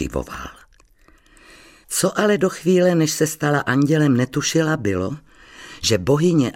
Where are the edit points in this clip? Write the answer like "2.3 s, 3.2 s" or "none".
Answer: 1.8 s